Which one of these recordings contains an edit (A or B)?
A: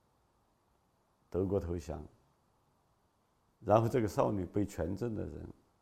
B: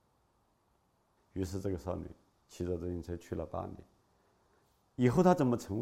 B